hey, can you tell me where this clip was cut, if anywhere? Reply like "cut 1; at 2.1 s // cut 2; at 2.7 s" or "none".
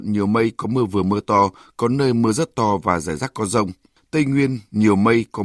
cut 1; at 4.0 s